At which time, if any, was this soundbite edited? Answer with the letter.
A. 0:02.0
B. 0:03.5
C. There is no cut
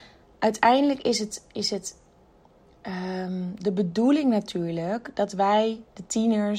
C